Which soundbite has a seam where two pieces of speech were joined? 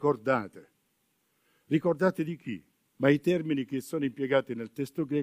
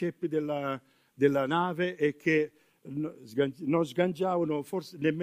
first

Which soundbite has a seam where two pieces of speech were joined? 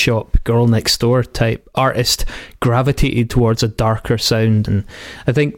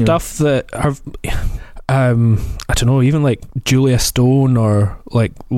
first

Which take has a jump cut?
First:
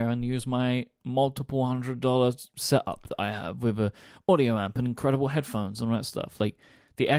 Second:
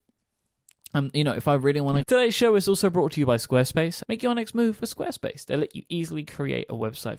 second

